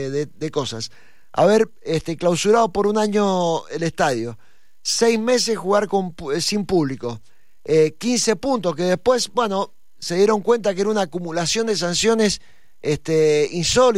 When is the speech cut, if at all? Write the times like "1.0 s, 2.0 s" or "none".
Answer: none